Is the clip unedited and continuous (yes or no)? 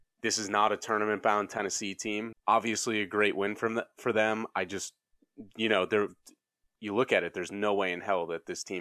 no